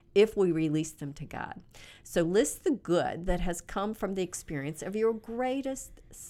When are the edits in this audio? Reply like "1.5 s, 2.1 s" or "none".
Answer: none